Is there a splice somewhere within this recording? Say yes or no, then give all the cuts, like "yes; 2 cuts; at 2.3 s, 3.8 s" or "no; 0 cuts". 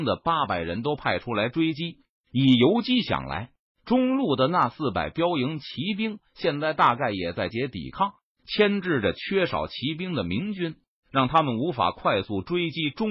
yes; 1 cut; at 7.5 s